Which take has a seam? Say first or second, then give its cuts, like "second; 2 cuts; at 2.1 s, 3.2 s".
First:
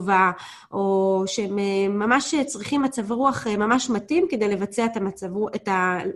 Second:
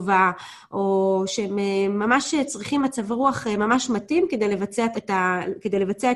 second; 1 cut; at 4.9 s